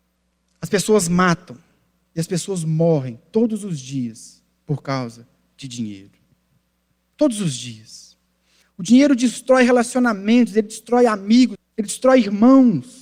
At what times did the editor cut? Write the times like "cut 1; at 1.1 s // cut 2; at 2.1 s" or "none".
cut 1; at 8.6 s // cut 2; at 11.6 s